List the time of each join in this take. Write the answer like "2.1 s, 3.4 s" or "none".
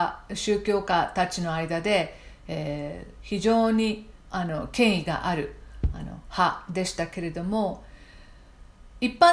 4.2 s

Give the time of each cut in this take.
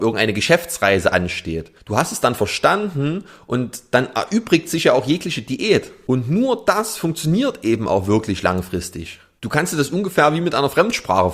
none

